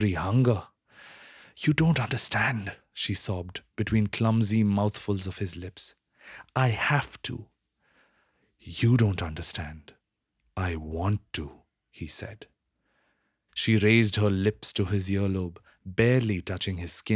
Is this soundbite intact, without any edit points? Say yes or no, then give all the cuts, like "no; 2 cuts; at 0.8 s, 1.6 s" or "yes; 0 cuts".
no; 1 cut; at 13.5 s